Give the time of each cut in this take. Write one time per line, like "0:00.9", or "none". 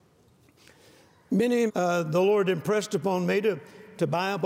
0:01.7